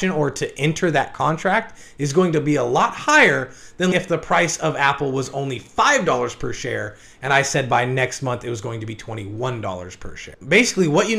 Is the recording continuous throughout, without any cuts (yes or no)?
no